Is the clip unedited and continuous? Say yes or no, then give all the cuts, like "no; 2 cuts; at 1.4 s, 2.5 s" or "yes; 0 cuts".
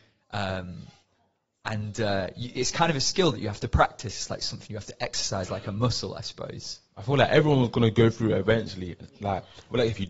yes; 0 cuts